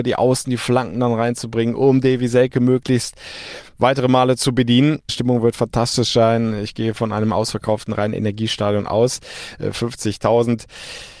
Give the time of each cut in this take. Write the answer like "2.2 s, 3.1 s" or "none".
5.1 s